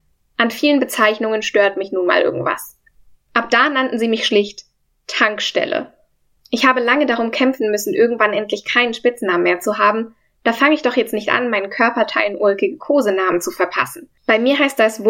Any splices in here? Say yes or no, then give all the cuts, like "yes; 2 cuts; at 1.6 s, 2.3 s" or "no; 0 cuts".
yes; 1 cut; at 3.1 s